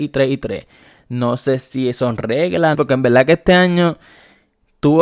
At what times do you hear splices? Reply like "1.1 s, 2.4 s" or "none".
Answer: 2.7 s